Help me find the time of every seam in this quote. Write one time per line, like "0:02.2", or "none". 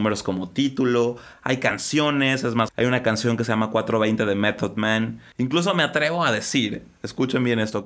0:05.3